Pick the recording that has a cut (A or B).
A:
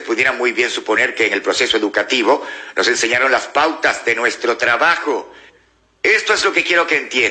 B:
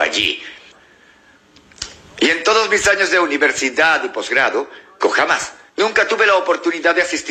B